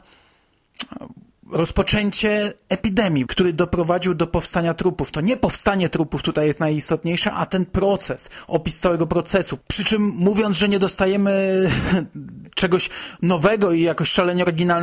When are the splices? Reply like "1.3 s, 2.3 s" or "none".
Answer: 3.3 s